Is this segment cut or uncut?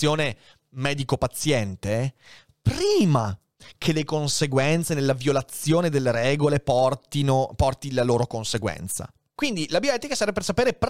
cut